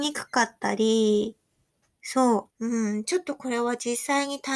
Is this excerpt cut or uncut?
cut